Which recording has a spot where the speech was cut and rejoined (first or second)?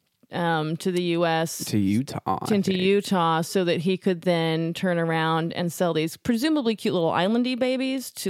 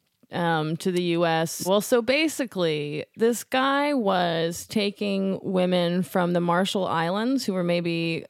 second